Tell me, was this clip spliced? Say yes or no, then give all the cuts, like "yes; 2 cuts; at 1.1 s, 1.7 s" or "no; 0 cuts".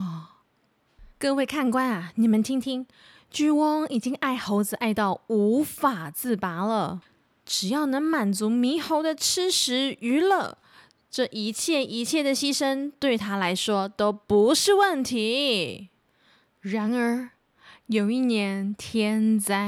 yes; 1 cut; at 1.1 s